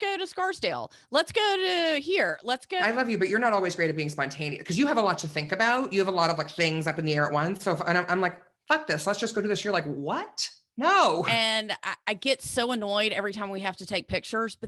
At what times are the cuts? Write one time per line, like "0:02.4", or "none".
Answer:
none